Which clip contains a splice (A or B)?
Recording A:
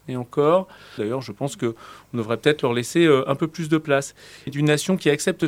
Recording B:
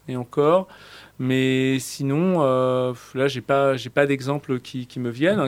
A